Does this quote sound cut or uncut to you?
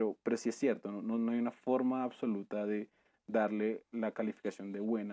uncut